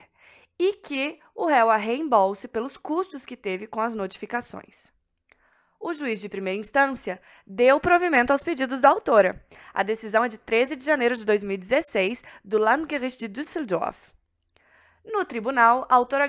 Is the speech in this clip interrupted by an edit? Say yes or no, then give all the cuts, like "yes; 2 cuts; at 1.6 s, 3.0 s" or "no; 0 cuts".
no; 0 cuts